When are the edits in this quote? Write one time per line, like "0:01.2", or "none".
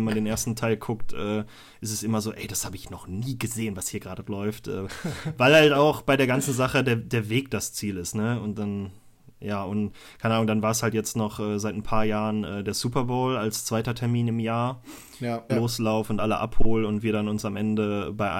0:15.5

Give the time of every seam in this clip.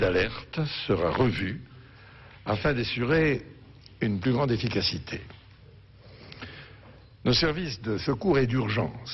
none

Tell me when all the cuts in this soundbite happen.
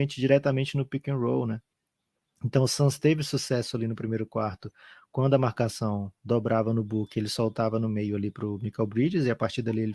none

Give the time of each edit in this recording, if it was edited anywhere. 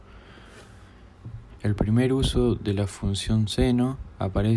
0:01.5

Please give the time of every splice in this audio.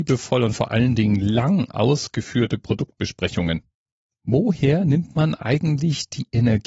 none

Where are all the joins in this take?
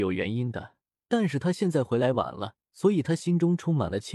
0:00.9
0:02.7

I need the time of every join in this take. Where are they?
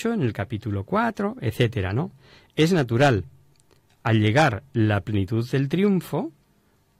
none

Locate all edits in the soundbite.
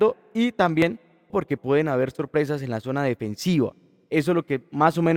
0:01.3

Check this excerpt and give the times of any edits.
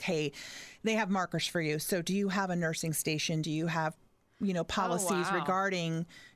none

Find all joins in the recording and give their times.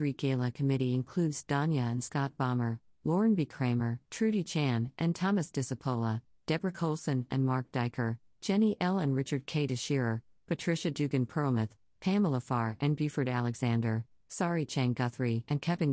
none

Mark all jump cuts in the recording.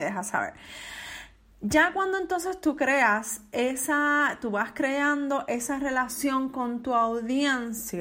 none

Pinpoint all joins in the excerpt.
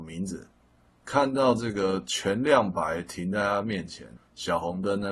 0:04.2

